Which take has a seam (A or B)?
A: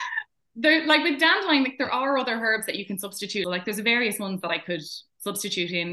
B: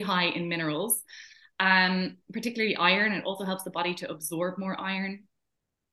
A